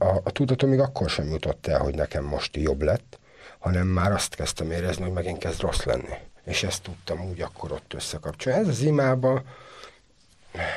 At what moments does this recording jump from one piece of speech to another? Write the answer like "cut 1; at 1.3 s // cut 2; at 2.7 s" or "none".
cut 1; at 6.4 s